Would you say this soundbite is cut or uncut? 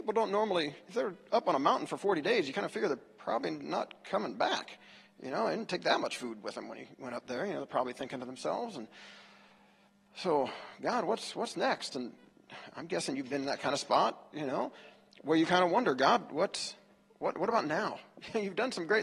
uncut